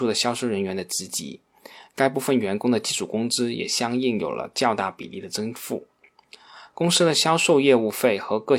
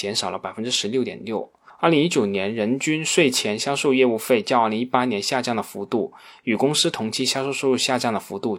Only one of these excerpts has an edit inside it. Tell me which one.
first; 1 cut; at 6.7 s

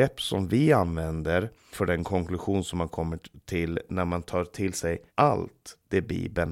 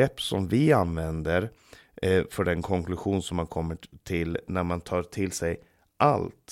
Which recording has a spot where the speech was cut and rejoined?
first; 2 cuts; at 1.7 s, 5.1 s

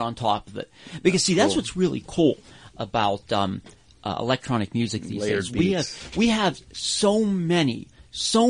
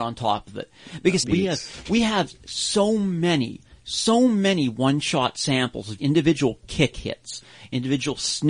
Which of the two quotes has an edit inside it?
second; 2 cuts; at 1.2 s, 6.0 s

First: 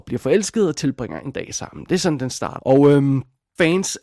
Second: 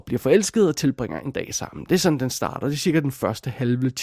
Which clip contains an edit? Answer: first; 1 cut; at 2.6 s

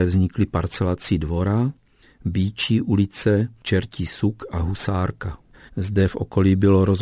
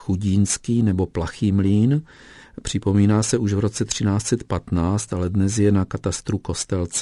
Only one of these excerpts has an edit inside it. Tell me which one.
first; 1 cut; at 5.7 s

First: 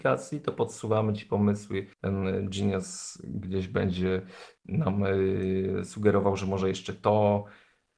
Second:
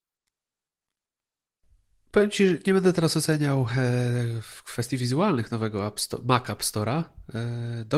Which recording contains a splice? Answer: first; 1 cut; at 1.9 s

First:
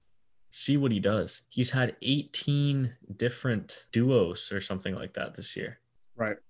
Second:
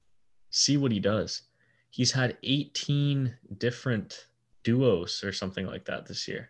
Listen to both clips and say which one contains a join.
first; 2 cuts; at 1.4 s, 3.9 s

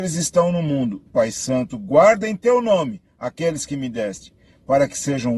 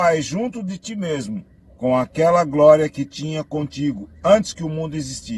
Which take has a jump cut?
first; 1 cut; at 1.1 s

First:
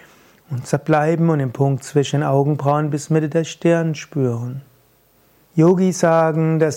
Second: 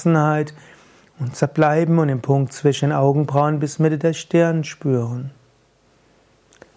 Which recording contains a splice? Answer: first; 1 cut; at 5.4 s

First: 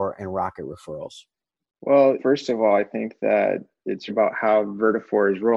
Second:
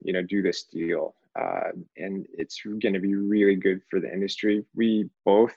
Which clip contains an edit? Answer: first; 2 cuts; at 2.2 s, 4.1 s

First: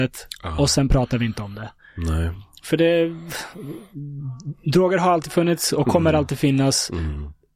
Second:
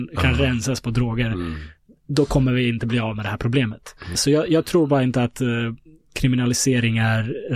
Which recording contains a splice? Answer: second; 1 cut; at 4.1 s

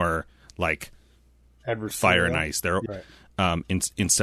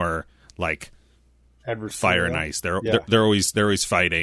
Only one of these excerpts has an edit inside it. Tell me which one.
first; 1 cut; at 2.9 s

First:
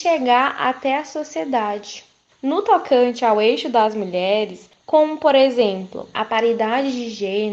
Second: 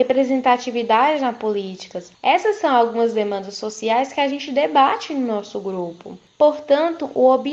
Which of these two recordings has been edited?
first; 3 cuts; at 2.3 s, 4.7 s, 6.1 s

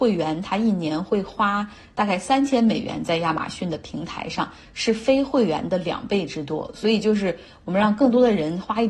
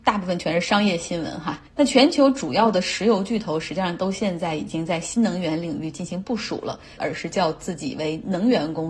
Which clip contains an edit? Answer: second; 2 cuts; at 1.7 s, 7.0 s

